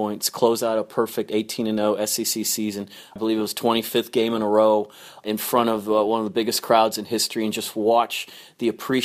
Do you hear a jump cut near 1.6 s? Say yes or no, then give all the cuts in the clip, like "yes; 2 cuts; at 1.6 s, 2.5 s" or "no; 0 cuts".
no; 0 cuts